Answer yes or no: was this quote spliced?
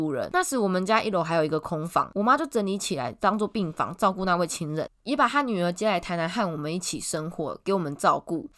no